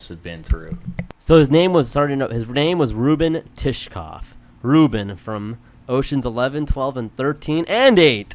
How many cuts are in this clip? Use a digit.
1